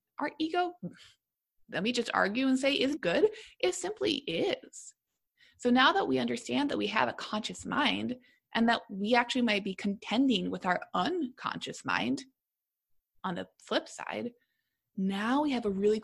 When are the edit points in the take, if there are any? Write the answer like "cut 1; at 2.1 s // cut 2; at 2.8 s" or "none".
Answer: cut 1; at 3.0 s